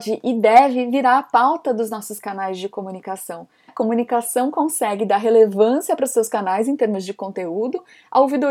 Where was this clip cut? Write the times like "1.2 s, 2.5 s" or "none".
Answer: 3.7 s